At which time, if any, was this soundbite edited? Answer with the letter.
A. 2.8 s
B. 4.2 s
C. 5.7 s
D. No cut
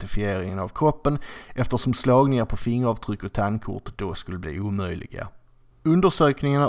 C